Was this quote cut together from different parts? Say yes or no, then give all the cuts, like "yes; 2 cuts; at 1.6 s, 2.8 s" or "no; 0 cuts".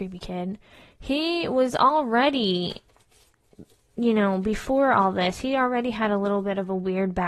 no; 0 cuts